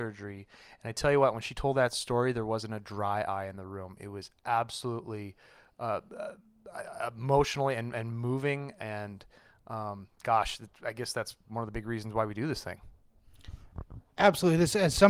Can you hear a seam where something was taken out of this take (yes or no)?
no